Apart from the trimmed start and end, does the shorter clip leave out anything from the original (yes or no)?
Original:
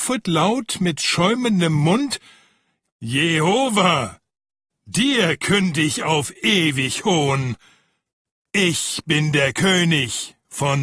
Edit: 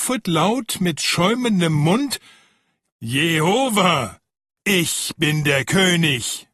yes